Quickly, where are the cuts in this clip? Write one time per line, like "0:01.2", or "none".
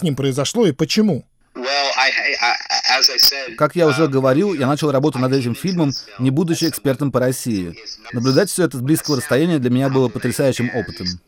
0:08.1